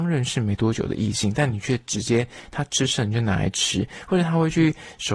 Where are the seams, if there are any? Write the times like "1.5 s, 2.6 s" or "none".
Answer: none